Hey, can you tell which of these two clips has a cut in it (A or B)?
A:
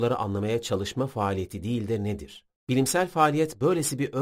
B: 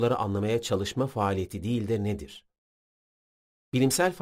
A